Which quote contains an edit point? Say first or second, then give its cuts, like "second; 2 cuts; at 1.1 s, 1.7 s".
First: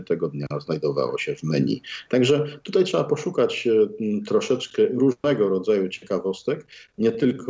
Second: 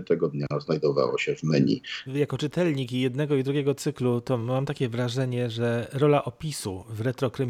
second; 1 cut; at 2.1 s